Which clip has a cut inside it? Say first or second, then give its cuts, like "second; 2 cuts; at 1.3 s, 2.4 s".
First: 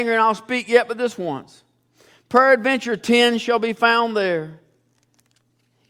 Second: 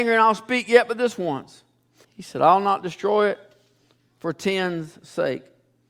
second; 1 cut; at 2.0 s